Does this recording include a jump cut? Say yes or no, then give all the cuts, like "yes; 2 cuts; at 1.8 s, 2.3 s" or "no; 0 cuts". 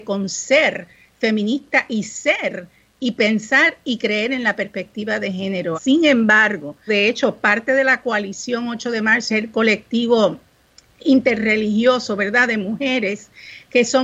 yes; 3 cuts; at 5.7 s, 6.9 s, 9.3 s